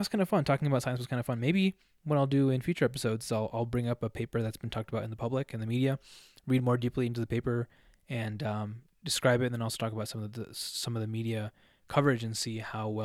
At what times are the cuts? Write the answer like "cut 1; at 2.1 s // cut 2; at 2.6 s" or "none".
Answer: none